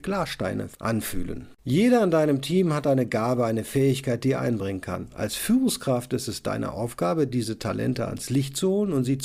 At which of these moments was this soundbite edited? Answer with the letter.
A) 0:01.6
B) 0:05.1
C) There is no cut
A